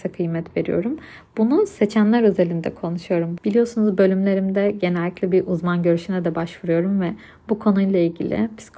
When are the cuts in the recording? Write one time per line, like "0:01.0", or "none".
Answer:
0:03.4